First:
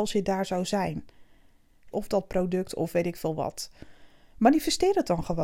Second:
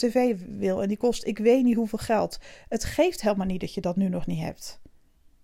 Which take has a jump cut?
first; 1 cut; at 1.9 s

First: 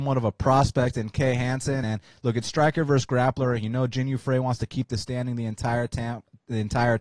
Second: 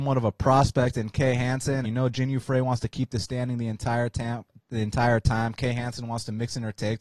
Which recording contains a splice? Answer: second; 1 cut; at 1.8 s

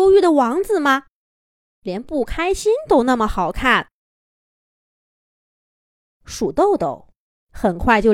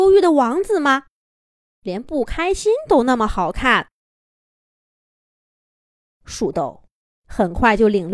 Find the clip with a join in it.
second; 1 cut; at 6.5 s

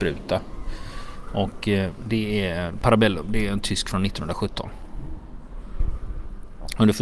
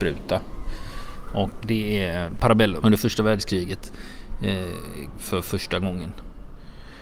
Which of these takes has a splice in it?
second; 3 cuts; at 1.6 s, 2.8 s, 5.1 s

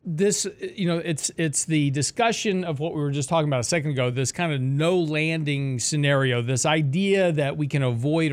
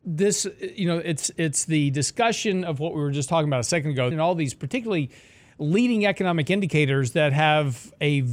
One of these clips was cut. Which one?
second; 1 cut; at 4.1 s

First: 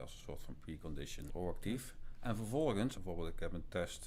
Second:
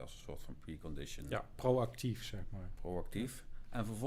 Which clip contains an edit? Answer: first; 2 cuts; at 1.3 s, 2.9 s

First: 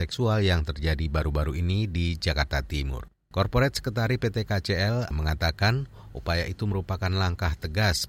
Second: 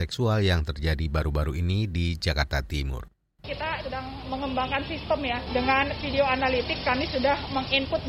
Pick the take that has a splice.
first; 2 cuts; at 3.3 s, 5.1 s

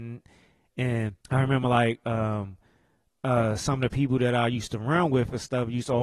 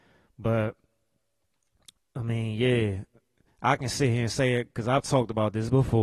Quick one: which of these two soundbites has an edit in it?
first; 1 cut; at 1.2 s

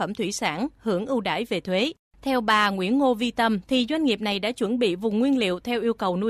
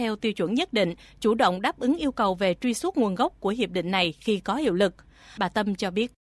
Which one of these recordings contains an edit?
first; 1 cut; at 3.6 s

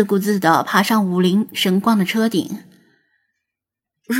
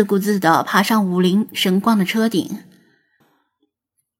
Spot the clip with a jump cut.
second; 1 cut; at 3.2 s

